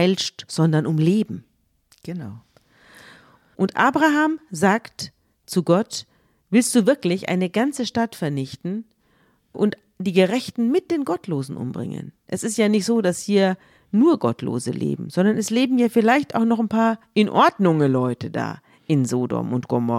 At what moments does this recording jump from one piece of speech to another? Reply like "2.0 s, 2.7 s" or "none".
none